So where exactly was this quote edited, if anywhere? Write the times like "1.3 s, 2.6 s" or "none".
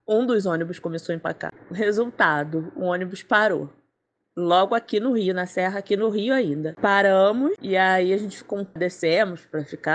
8.8 s